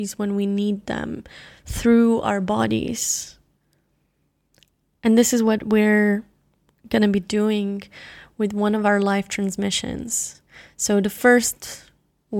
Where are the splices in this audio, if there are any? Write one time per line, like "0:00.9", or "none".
none

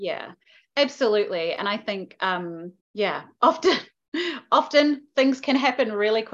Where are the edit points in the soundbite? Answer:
0:02.8

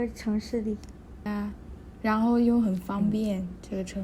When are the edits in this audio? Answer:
0:01.3

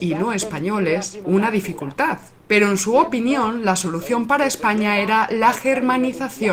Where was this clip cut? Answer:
0:01.2

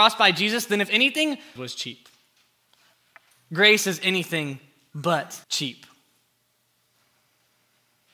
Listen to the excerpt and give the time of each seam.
0:01.6
0:05.4

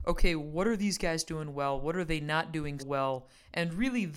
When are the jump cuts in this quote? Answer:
0:02.8

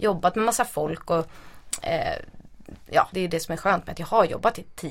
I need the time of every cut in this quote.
0:03.1

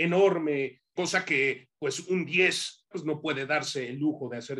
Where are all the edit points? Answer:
0:01.0
0:02.9

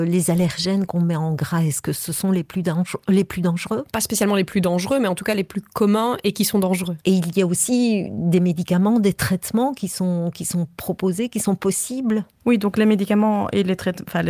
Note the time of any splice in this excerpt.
none

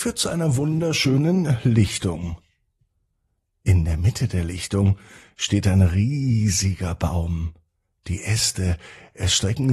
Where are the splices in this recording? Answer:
none

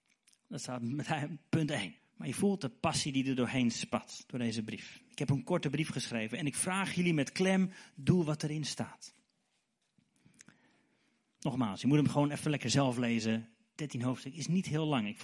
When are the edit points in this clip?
0:02.0

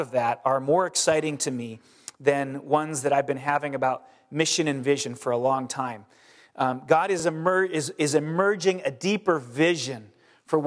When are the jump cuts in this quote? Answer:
none

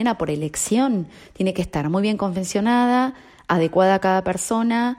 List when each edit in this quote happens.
none

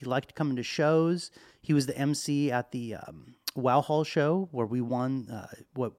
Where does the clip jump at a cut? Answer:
none

